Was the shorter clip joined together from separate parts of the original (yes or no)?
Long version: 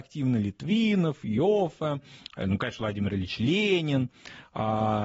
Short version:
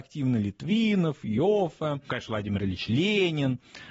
yes